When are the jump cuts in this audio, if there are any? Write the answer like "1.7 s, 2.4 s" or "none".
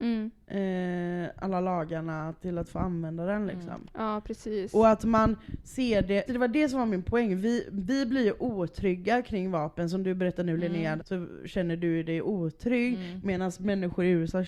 6.3 s, 11.0 s